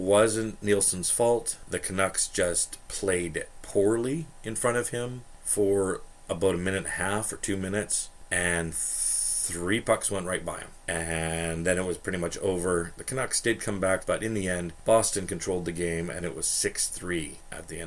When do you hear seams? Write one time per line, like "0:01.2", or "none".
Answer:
0:14.0